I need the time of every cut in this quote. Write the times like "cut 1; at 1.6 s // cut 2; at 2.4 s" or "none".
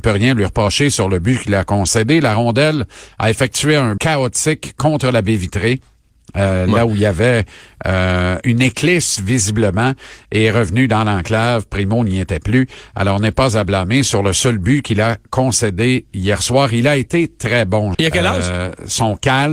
cut 1; at 4.0 s // cut 2; at 8.4 s // cut 3; at 17.9 s